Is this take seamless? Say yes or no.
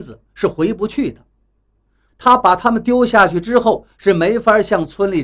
no